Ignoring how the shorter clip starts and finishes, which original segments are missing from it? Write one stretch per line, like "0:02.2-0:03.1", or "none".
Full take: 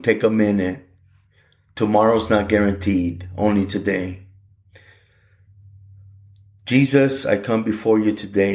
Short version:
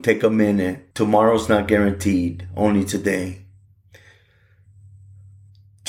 0:00.9-0:01.7